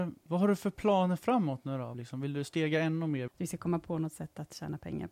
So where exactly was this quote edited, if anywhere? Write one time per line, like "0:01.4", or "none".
0:01.9
0:03.3